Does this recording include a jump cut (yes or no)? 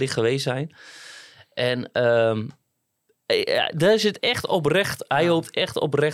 no